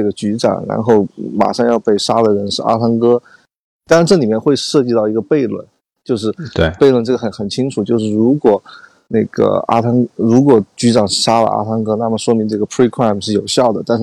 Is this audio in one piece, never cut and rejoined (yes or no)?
no